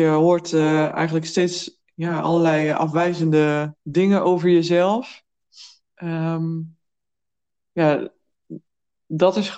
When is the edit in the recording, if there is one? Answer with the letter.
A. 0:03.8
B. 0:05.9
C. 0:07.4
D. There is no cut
A